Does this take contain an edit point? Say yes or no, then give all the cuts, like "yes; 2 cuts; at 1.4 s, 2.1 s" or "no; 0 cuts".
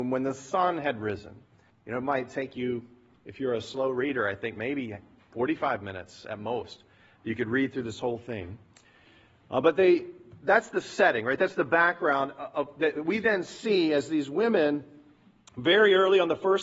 yes; 1 cut; at 1.7 s